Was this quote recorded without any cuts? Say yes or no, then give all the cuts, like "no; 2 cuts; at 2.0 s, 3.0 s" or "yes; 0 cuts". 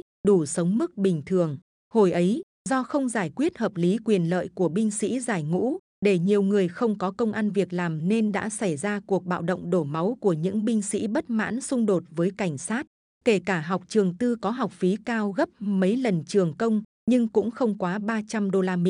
no; 2 cuts; at 1.9 s, 13.2 s